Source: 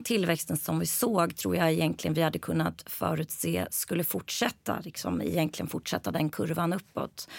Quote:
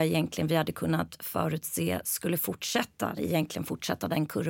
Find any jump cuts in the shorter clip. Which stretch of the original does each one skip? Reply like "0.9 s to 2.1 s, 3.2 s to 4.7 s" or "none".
4.8 s to 5.2 s